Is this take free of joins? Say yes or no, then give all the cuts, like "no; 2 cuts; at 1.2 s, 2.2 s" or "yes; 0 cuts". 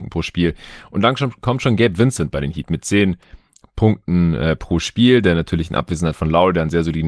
yes; 0 cuts